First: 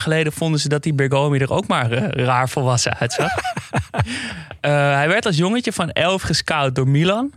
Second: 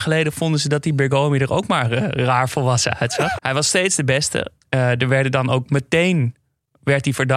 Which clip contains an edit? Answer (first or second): second